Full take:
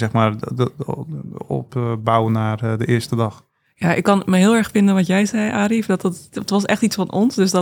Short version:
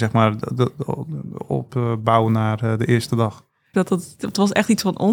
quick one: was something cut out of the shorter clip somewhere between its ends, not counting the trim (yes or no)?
yes